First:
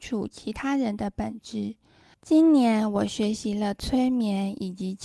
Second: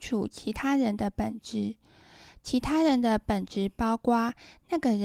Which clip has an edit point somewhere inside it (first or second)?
first